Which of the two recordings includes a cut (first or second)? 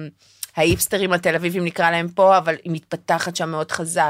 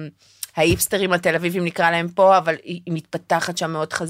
first